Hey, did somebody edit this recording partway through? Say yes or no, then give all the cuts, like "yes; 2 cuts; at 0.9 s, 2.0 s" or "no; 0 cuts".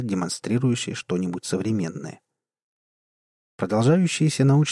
no; 0 cuts